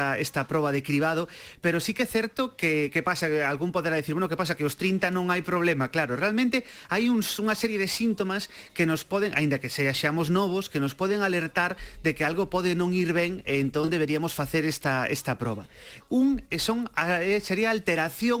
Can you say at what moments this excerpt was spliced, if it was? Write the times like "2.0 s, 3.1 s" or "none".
16.0 s